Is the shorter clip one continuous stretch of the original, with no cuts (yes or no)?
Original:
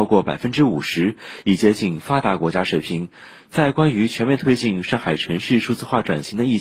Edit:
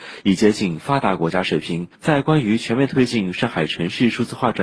no